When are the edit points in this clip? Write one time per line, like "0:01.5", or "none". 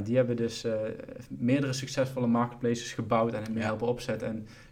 none